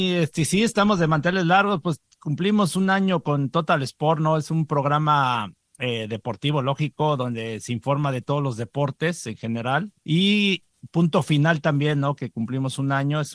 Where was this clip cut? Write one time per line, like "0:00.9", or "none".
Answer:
none